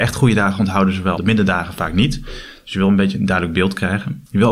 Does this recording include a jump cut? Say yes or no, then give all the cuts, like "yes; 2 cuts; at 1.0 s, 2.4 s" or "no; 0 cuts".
yes; 1 cut; at 1.2 s